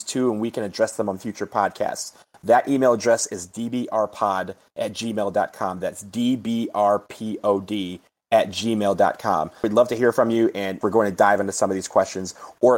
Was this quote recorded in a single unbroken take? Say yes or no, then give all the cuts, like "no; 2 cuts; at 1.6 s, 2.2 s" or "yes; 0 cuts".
no; 2 cuts; at 9.6 s, 10.8 s